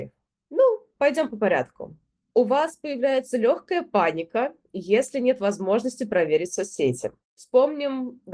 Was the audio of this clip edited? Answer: no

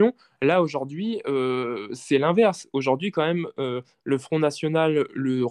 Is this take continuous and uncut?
yes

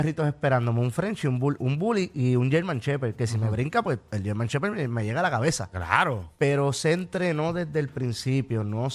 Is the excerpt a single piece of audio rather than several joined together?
no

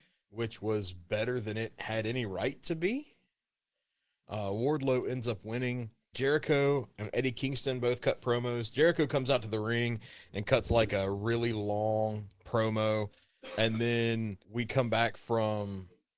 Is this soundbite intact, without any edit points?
no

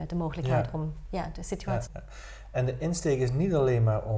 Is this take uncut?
no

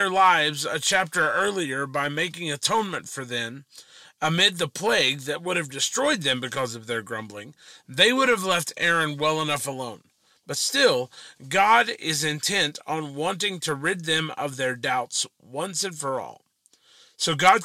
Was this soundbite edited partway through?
no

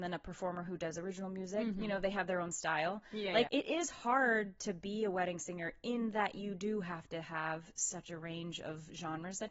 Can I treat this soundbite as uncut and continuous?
no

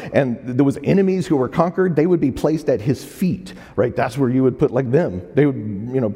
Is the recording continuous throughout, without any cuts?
yes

